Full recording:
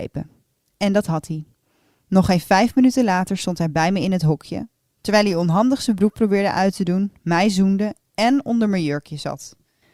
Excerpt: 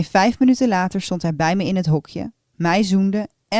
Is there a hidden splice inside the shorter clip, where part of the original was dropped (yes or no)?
yes